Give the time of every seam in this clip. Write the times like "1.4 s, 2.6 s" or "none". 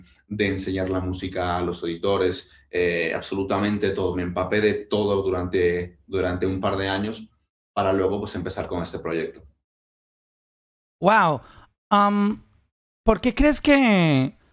none